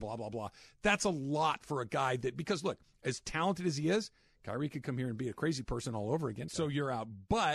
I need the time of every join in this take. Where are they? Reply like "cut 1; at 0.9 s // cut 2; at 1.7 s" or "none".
cut 1; at 6.5 s